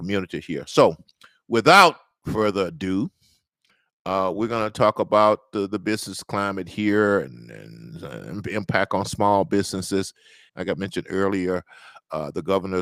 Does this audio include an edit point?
yes; 1 cut; at 10.5 s

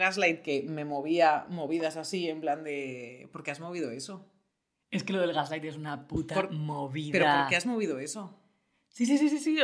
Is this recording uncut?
yes; 0 cuts

